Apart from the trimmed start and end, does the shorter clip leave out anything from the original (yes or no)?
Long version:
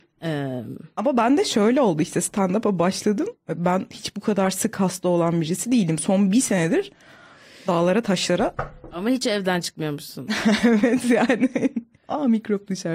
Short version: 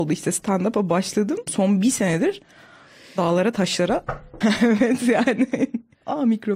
yes